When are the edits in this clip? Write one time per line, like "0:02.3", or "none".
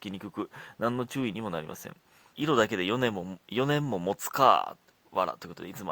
0:02.3